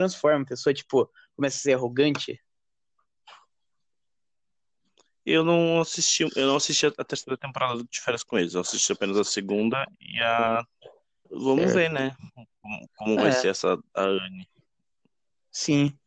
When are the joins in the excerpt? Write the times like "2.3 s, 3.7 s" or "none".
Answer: 11.2 s